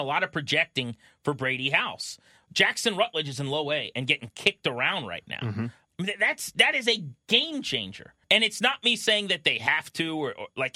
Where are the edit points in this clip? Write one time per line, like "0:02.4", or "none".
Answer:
0:05.9
0:08.2